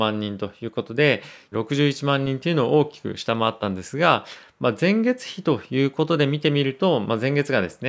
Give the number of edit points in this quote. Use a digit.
1